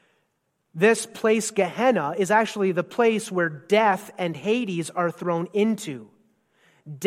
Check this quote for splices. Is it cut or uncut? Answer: uncut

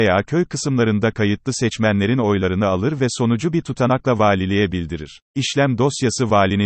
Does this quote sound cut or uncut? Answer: cut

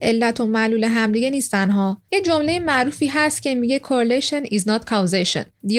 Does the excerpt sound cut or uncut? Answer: uncut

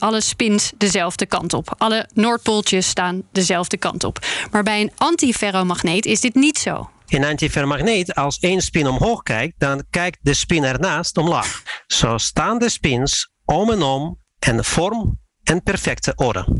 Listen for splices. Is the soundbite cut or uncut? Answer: uncut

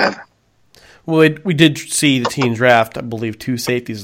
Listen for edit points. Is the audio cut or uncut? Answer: uncut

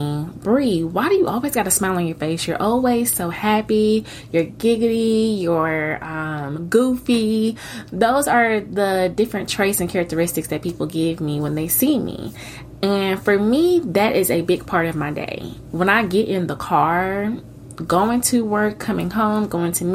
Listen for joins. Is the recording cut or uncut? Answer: uncut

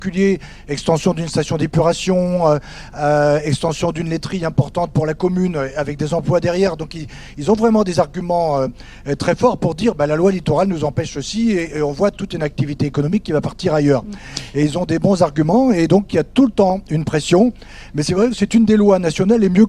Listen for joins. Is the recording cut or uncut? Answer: uncut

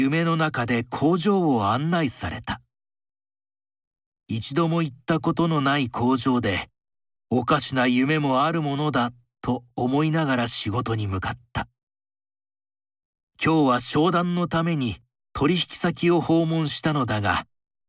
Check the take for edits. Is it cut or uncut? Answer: uncut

